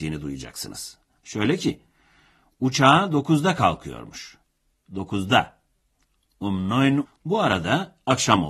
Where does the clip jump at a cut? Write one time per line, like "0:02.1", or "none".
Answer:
0:07.1

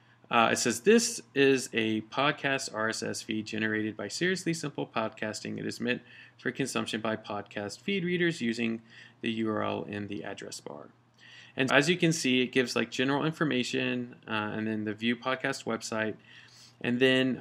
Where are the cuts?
0:11.7

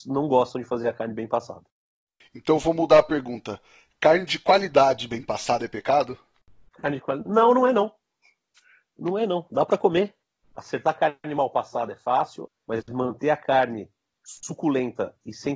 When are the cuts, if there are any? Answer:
0:10.4
0:12.5

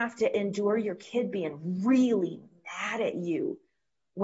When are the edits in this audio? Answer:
none

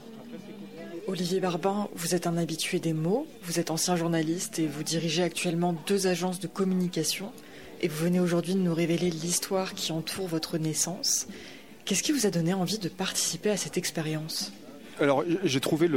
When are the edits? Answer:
none

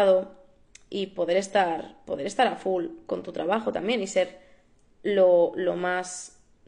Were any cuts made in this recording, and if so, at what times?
none

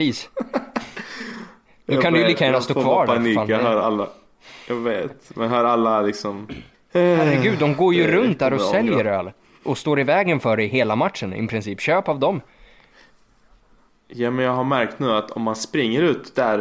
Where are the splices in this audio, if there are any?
0:06.7

